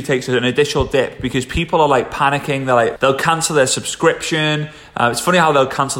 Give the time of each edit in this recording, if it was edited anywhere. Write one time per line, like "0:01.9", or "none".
0:03.0